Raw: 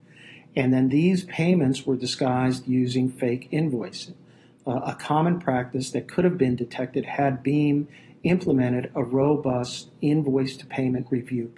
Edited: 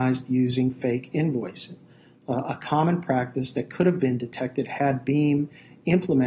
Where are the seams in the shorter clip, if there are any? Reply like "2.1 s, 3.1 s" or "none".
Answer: none